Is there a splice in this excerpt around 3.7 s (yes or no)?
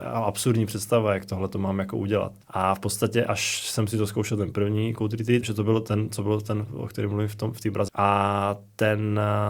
no